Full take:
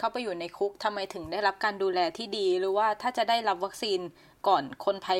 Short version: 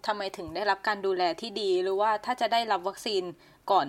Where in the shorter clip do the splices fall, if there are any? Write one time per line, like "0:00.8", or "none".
none